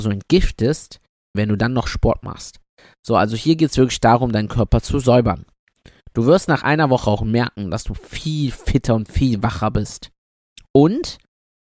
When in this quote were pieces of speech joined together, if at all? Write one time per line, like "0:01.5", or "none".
0:01.3

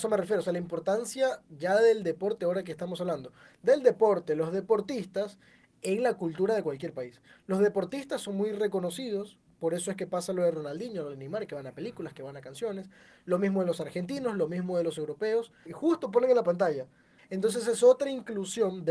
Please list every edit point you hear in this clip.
0:15.6
0:17.2

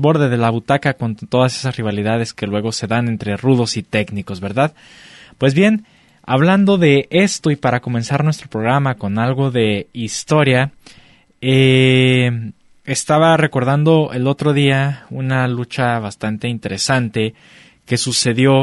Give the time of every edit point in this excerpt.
none

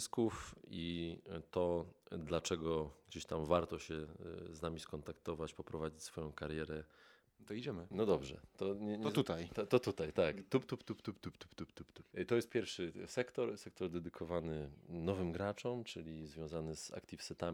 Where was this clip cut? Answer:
0:07.3

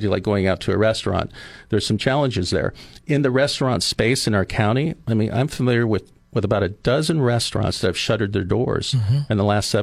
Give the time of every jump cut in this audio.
none

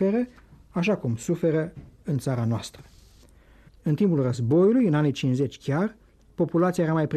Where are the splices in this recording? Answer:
0:03.7

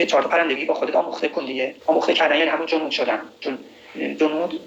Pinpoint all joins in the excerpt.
0:01.8

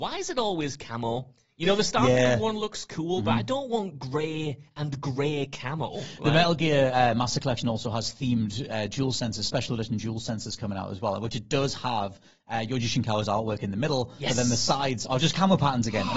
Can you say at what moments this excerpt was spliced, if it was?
none

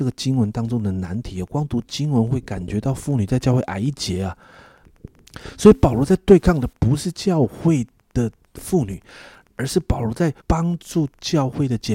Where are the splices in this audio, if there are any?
0:04.8
0:10.4

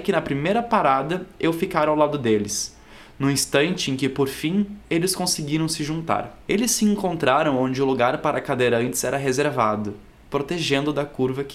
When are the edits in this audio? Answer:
0:06.4
0:10.2

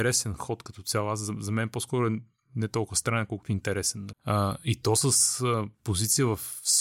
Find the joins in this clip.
0:04.1

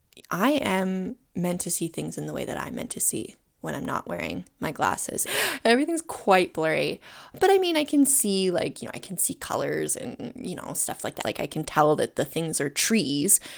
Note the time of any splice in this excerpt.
0:05.3
0:11.2

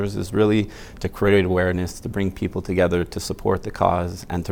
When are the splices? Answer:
none

